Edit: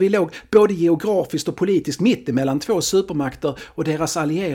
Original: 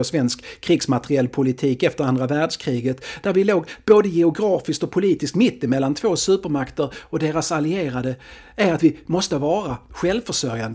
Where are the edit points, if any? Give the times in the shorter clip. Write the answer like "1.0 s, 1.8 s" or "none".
none